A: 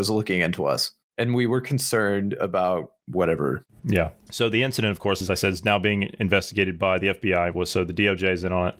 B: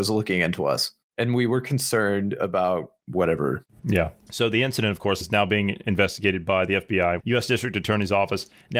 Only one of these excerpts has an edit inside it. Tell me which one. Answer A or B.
B